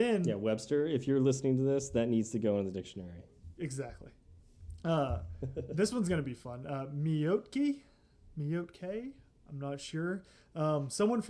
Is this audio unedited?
yes; 0 cuts

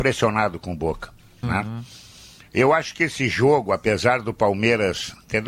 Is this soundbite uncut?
no; 1 cut; at 1.4 s

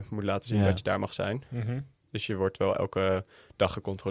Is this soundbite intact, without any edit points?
yes; 0 cuts

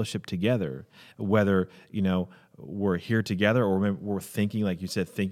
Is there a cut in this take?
no; 0 cuts

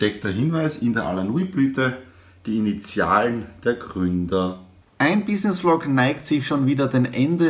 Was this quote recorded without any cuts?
yes; 0 cuts

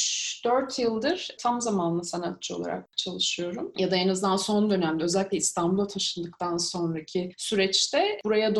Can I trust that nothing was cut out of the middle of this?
no; 1 cut; at 3.7 s

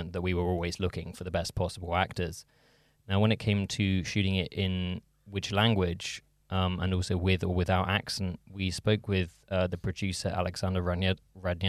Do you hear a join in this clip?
no; 0 cuts

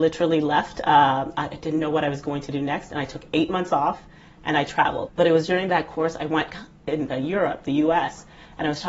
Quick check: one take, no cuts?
no; 2 cuts; at 5.1 s, 7.1 s

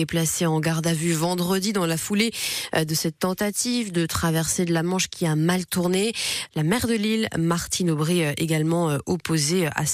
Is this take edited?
yes; 1 cut; at 6.5 s

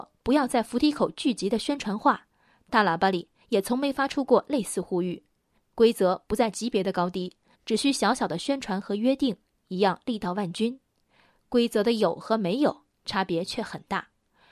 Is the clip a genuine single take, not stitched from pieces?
no; 1 cut; at 7.5 s

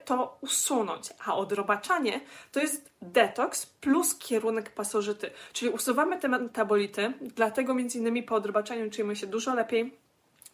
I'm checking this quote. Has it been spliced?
no; 0 cuts

